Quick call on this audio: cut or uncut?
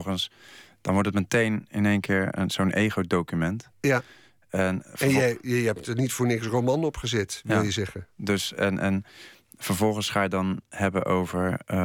uncut